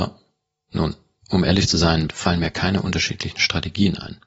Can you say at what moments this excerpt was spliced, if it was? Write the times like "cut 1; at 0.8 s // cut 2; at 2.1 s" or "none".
cut 1; at 2.1 s